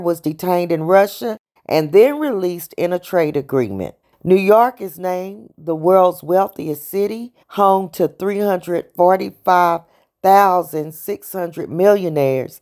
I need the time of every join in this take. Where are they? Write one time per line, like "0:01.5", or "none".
0:01.6
0:04.0
0:07.4